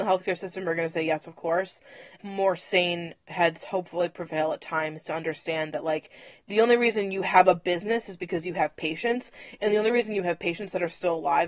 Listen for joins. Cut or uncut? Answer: cut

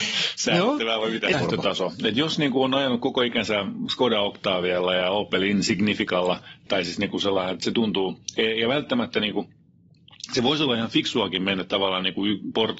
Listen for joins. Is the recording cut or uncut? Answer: cut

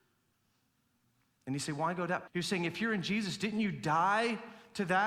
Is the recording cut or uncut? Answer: cut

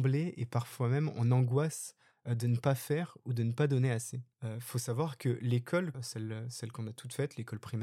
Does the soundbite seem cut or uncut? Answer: cut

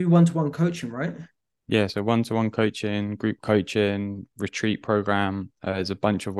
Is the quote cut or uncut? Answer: uncut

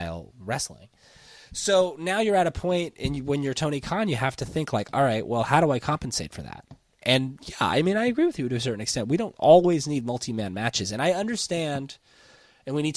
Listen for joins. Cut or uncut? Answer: uncut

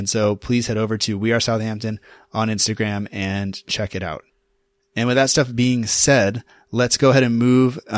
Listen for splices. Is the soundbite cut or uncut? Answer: uncut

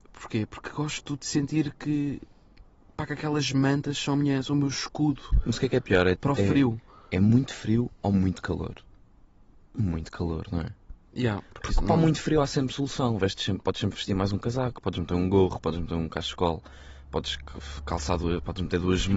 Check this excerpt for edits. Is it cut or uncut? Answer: uncut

